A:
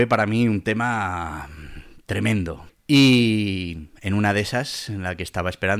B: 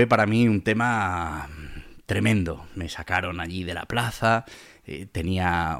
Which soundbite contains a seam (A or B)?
A